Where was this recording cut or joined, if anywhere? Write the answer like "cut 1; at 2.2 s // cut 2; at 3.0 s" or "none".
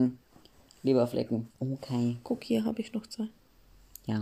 cut 1; at 1.5 s